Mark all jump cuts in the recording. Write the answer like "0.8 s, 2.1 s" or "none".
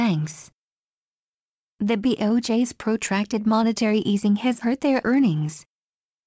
4.6 s